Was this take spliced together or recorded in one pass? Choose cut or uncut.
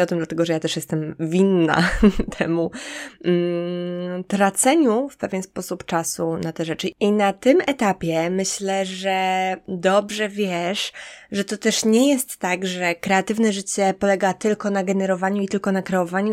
uncut